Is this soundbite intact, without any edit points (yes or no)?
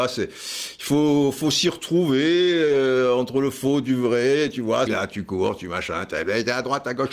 no